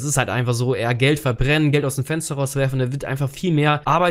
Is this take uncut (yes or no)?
yes